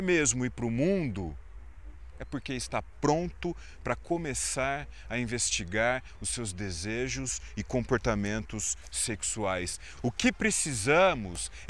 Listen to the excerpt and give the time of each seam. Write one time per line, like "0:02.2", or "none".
0:10.0